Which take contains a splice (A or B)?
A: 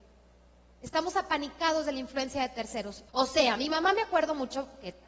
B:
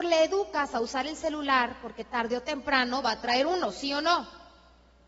A